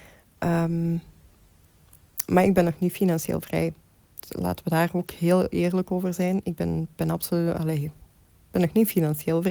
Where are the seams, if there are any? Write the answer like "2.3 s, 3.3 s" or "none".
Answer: none